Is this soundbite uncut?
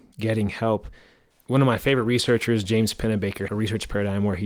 no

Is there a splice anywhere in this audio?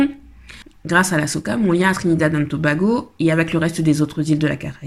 no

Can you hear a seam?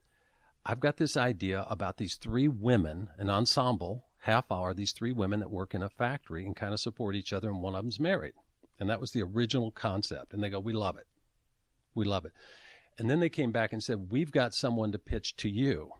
no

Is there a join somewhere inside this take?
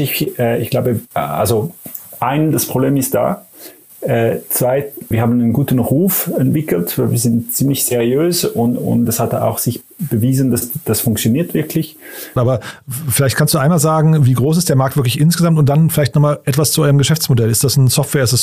yes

